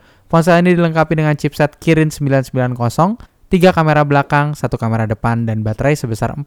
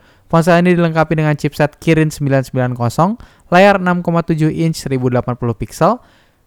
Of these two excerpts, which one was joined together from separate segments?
first; 1 cut; at 3.2 s

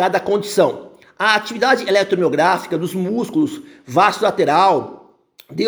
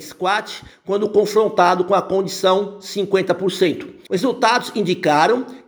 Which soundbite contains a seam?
second; 1 cut; at 4.1 s

